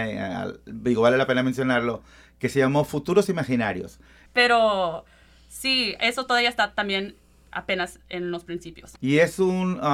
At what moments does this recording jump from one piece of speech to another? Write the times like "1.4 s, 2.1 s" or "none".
4.3 s, 9.0 s